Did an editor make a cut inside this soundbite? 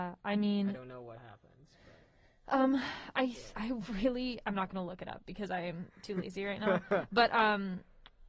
yes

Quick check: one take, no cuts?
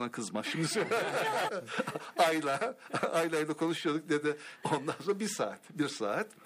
no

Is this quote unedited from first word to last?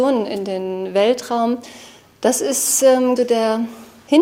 no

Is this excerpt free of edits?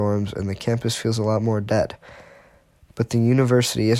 yes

